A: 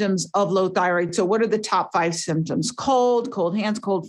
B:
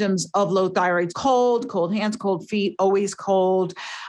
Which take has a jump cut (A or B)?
B